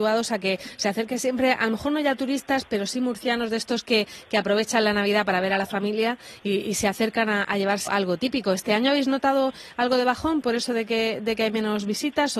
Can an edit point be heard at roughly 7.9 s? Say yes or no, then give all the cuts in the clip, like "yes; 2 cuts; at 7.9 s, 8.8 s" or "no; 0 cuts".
yes; 1 cut; at 7.9 s